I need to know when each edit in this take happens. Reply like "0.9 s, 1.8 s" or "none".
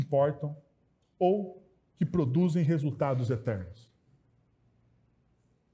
none

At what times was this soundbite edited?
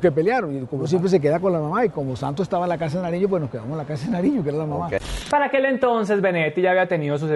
none

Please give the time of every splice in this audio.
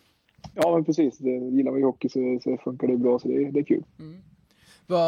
none

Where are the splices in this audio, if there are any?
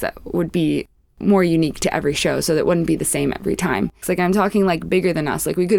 4.0 s

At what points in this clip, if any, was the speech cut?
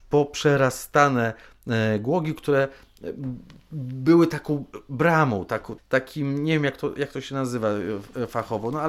5.8 s

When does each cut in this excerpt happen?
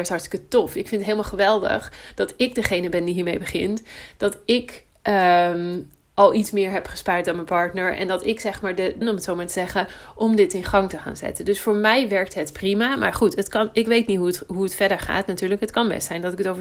9.0 s

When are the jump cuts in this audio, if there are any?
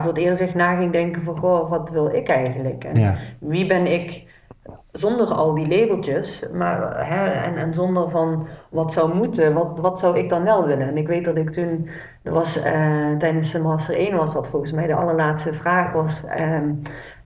none

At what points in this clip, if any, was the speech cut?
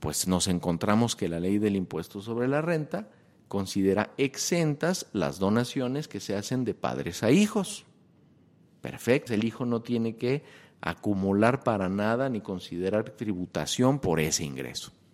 9.3 s

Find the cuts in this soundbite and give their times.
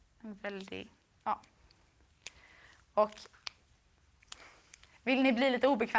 none

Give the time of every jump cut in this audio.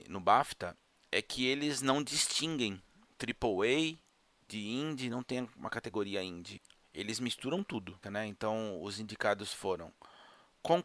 8.0 s

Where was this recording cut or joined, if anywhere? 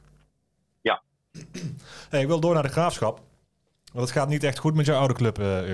none

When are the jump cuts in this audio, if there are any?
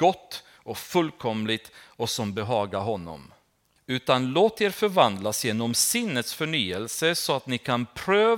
3.8 s

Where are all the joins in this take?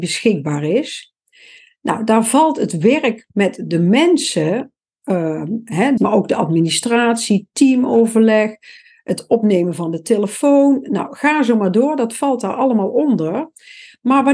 6.0 s

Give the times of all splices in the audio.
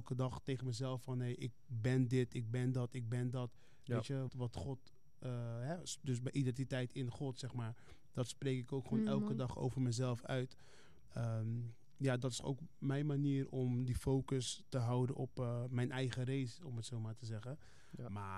4.3 s

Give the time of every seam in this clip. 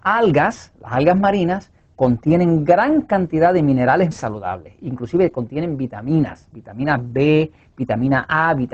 4.1 s

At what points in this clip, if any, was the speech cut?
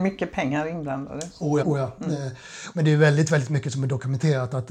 1.6 s, 2.7 s

